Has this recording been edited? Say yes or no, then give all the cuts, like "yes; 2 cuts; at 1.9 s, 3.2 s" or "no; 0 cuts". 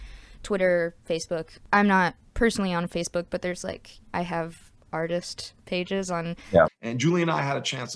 yes; 2 cuts; at 4.0 s, 6.7 s